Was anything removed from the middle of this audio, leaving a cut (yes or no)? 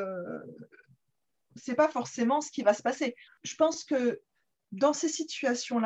yes